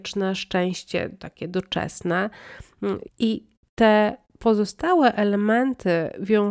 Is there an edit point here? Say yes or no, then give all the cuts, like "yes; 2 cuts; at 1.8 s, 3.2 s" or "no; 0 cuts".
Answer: yes; 1 cut; at 3.0 s